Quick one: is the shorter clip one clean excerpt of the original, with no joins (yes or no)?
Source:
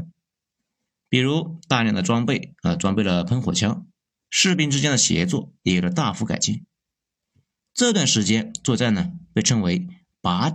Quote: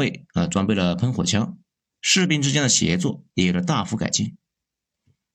yes